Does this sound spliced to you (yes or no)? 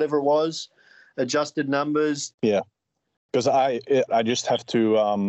yes